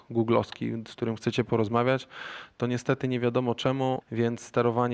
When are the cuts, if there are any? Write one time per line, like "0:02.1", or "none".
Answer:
0:04.0